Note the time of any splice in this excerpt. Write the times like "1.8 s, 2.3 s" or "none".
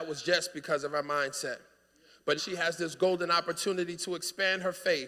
2.4 s